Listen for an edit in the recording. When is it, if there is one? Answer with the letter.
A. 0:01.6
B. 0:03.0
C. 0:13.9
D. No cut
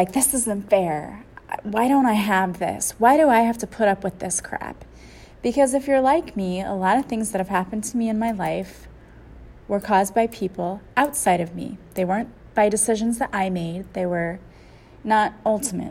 D